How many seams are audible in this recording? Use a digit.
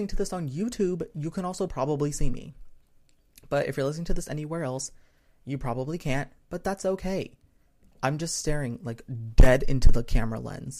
0